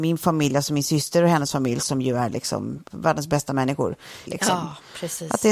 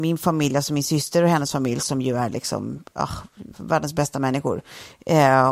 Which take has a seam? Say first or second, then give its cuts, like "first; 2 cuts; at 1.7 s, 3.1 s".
first; 2 cuts; at 2.9 s, 4.2 s